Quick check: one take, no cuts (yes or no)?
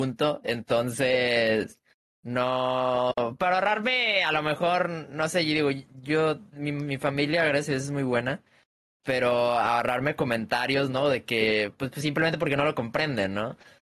yes